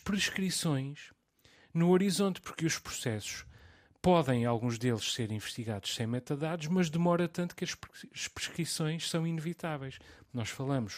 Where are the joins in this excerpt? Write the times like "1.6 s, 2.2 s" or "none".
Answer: none